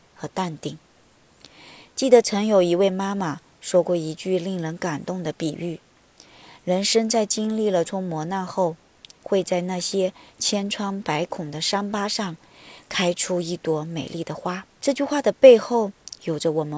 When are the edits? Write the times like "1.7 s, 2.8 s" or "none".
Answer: 7.9 s, 14.7 s